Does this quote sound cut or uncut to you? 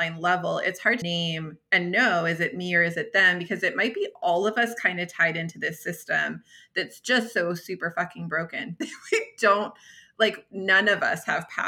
cut